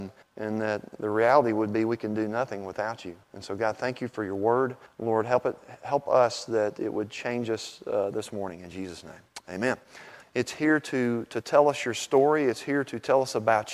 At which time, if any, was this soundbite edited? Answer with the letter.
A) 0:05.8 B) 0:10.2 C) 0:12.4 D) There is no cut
B